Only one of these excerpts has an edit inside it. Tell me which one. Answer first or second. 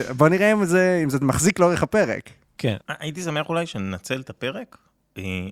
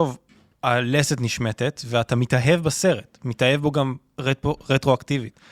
first